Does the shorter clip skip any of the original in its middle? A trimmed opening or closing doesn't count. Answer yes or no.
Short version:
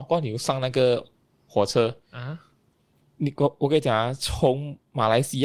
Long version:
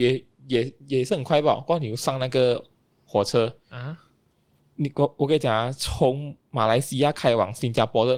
no